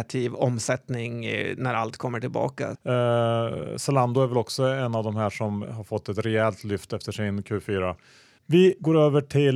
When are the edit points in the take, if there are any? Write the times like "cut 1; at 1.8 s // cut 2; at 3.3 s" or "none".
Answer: cut 1; at 2.7 s // cut 2; at 5.6 s // cut 3; at 8.4 s